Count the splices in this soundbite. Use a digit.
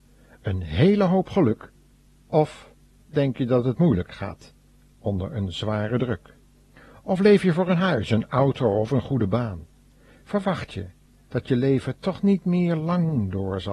0